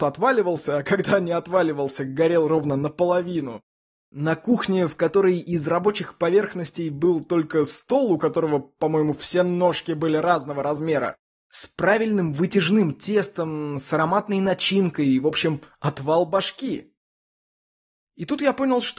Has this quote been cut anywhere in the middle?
yes; 1 cut; at 11.3 s

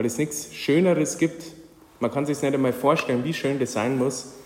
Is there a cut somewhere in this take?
no; 0 cuts

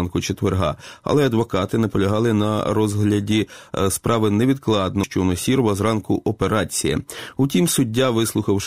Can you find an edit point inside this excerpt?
yes; 1 cut; at 5.0 s

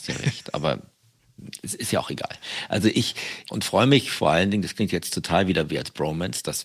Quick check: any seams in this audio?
yes; 1 cut; at 3.4 s

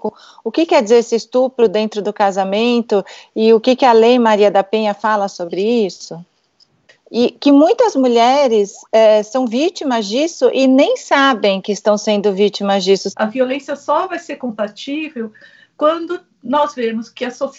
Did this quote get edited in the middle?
yes; 3 cuts; at 6.9 s, 8.8 s, 13.1 s

